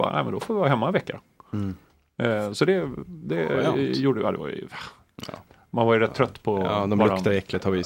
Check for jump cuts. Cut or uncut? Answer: uncut